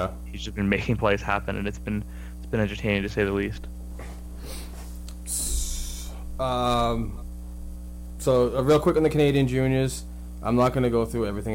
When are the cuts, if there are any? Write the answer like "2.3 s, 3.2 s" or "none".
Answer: none